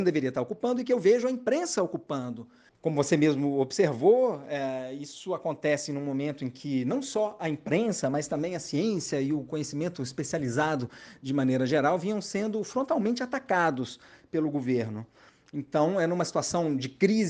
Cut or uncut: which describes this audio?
uncut